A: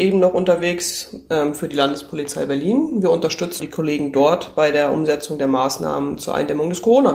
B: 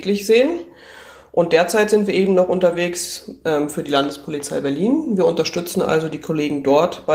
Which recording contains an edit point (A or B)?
A